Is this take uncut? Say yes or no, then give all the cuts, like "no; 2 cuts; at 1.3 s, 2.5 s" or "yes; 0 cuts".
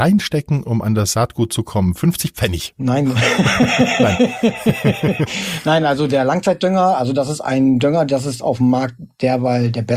yes; 0 cuts